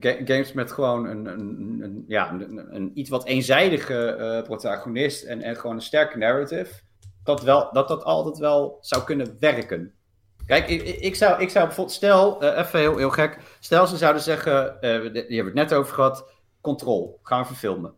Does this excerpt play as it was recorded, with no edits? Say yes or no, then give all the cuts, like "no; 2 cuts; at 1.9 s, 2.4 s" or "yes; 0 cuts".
no; 3 cuts; at 1.3 s, 7.3 s, 10.4 s